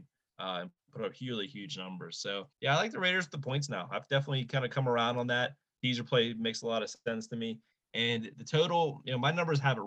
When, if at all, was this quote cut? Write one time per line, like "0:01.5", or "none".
0:02.5